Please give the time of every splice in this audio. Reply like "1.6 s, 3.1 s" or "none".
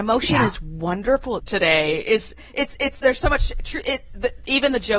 1.4 s